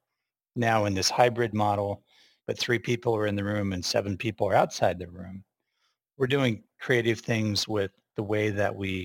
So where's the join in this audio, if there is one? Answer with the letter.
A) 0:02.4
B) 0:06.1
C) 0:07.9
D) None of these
A